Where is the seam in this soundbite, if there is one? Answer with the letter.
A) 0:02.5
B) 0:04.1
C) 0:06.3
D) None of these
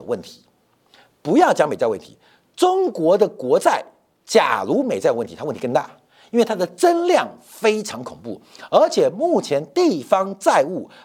D